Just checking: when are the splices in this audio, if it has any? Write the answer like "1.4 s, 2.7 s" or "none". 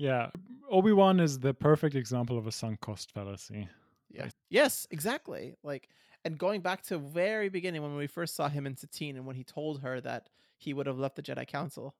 4.3 s